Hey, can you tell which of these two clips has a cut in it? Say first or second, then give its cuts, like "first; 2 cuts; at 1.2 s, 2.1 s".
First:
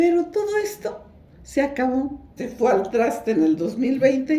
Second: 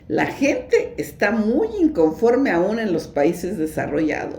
first; 1 cut; at 2.4 s